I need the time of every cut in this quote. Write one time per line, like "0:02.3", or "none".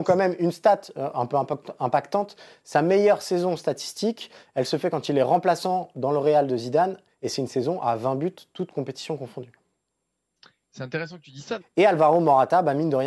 0:11.6